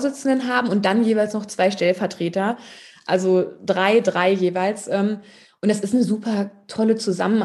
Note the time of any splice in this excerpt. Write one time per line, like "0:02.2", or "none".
none